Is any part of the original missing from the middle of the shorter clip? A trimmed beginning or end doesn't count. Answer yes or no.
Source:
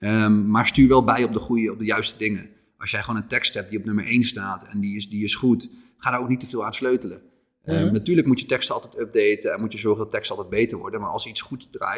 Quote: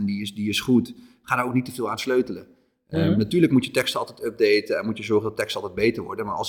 no